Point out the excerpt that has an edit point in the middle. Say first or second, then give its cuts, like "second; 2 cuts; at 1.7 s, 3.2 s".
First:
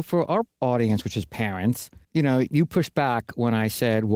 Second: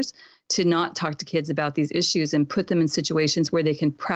first; 1 cut; at 2.1 s